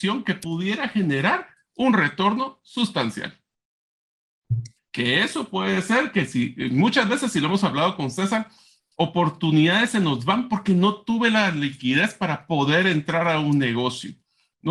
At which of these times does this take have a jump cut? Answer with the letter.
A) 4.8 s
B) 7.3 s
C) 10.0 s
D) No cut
A